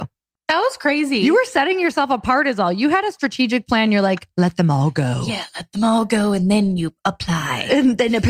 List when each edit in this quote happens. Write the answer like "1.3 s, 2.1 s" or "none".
none